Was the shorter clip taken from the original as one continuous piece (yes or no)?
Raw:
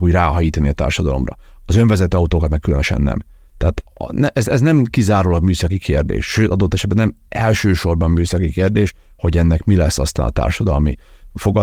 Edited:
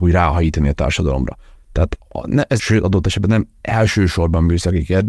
no